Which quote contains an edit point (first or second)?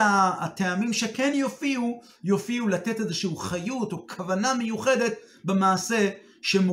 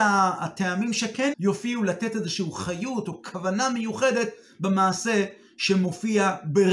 second